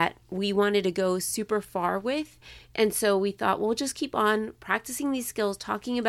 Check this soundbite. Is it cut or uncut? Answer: uncut